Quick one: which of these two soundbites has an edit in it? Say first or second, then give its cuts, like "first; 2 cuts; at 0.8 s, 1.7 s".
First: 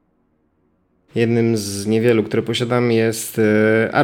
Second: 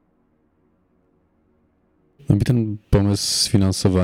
first; 1 cut; at 1.1 s